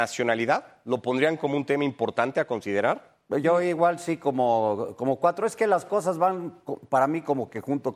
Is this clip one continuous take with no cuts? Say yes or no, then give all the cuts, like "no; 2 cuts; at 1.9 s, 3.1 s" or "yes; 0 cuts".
yes; 0 cuts